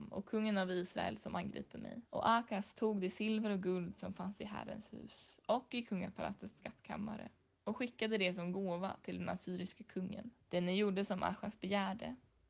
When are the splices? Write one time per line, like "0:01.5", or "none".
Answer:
0:02.1
0:10.4